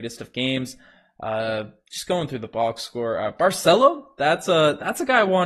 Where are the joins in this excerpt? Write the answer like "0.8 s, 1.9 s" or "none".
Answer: none